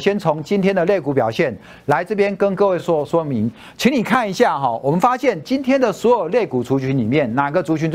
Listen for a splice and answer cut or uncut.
uncut